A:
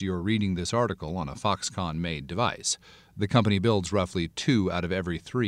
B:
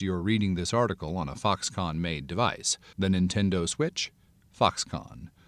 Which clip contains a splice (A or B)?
B